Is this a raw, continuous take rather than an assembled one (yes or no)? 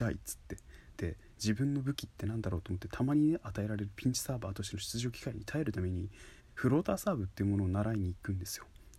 no